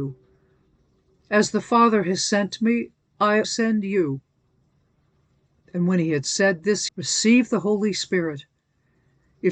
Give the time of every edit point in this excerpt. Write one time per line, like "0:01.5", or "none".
0:03.4
0:06.9